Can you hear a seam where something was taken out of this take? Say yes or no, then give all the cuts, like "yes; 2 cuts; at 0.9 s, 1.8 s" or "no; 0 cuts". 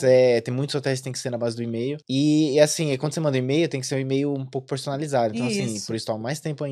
yes; 1 cut; at 2.0 s